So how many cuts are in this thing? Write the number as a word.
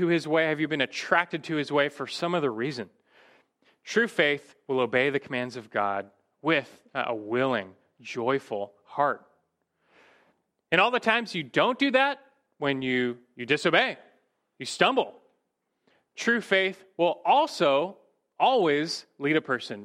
zero